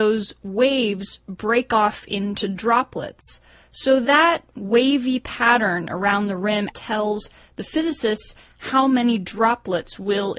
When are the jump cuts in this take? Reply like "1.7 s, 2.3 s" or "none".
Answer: 6.7 s